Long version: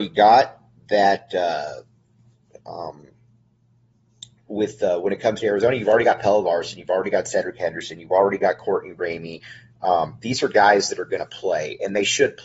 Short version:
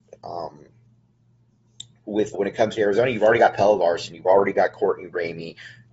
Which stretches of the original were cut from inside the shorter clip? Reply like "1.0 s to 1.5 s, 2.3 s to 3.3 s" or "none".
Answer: 4.8 s to 5.0 s, 6.8 s to 8.0 s

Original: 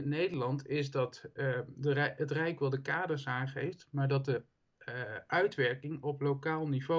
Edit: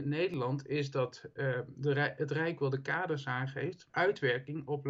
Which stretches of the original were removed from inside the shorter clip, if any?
3.9 s to 5.3 s

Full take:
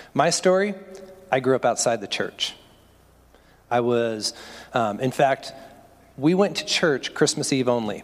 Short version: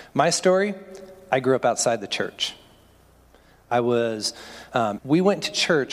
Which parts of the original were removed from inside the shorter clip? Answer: 5.0 s to 6.1 s

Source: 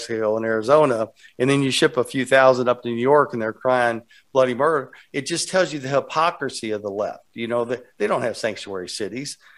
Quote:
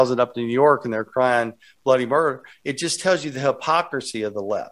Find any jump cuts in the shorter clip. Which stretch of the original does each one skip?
none

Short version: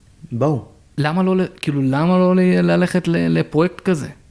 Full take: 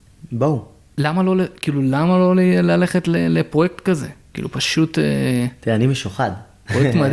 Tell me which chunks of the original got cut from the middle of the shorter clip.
none

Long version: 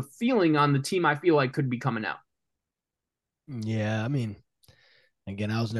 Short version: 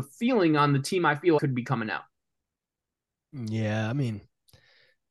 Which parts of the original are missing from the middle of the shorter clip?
1.4 s to 1.5 s

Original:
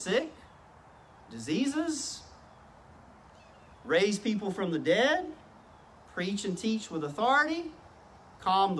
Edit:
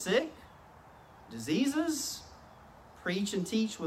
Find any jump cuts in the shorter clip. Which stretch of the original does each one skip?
2.9 s to 6.0 s

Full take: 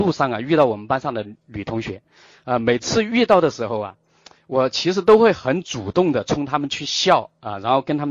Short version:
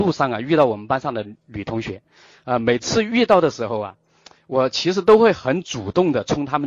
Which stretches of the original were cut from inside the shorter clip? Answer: none

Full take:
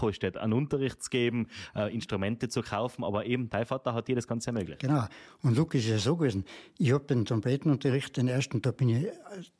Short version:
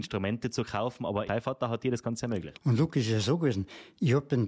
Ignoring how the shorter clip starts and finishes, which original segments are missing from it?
3.2 s to 3.5 s, 4.8 s to 5.3 s

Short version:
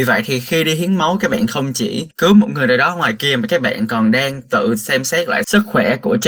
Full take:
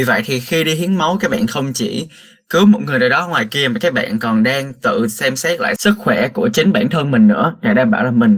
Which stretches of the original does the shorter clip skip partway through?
2.1 s to 2.4 s

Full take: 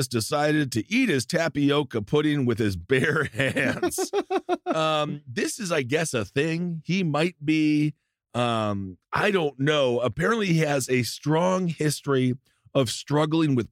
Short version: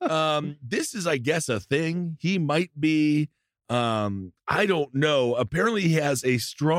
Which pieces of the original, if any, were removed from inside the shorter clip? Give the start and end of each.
none

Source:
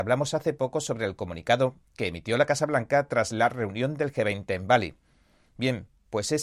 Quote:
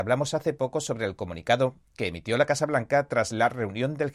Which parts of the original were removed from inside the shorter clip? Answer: none

